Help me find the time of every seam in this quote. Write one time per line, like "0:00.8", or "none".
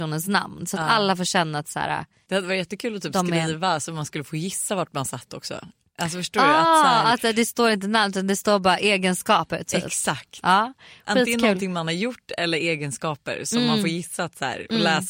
none